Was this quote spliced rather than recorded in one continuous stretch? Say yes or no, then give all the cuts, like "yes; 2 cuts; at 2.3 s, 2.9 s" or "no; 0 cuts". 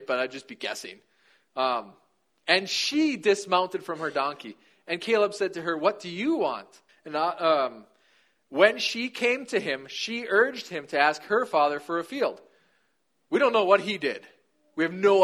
yes; 1 cut; at 6.9 s